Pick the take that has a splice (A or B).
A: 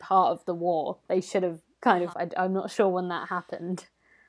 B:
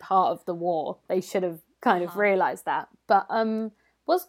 A